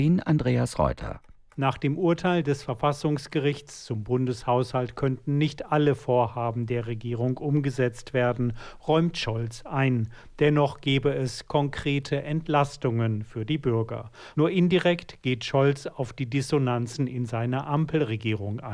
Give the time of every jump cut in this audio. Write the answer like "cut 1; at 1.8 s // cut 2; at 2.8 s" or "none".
none